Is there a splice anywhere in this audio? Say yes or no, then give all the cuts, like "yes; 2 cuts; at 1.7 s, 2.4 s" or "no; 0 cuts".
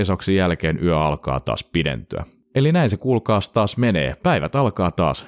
no; 0 cuts